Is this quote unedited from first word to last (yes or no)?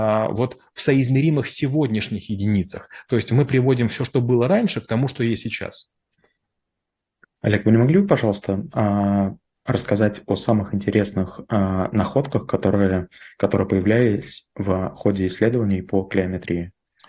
yes